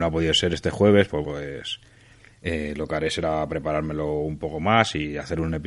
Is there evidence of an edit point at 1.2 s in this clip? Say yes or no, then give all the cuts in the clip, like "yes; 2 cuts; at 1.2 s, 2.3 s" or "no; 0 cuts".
yes; 1 cut; at 1.2 s